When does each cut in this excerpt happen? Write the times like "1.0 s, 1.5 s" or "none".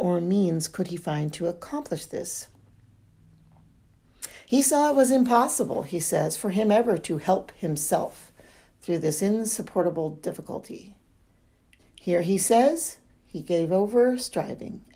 4.5 s, 11.8 s